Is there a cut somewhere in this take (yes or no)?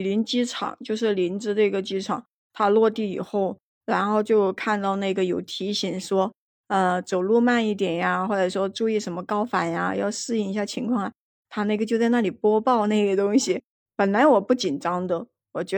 yes